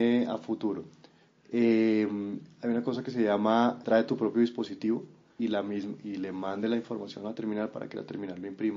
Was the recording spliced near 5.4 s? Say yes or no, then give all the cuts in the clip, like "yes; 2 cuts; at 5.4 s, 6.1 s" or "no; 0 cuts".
yes; 2 cuts; at 3.8 s, 5.4 s